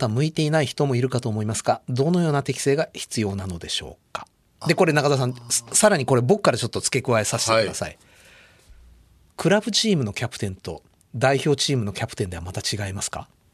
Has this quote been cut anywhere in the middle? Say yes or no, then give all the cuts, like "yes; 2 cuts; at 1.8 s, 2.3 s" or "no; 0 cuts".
no; 0 cuts